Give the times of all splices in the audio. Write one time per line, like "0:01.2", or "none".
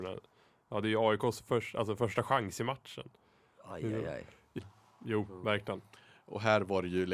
0:04.6